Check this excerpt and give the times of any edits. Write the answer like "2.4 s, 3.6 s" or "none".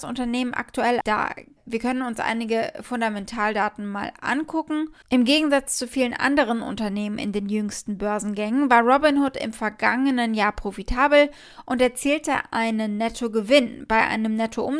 1.0 s, 5.0 s